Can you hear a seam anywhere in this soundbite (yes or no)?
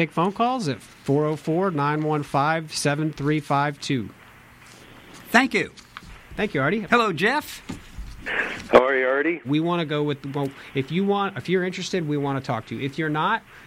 yes